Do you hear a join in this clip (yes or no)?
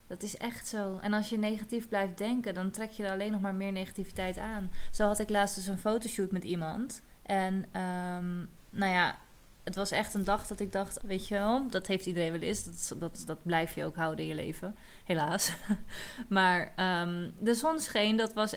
yes